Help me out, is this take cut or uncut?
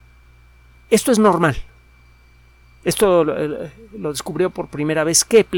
uncut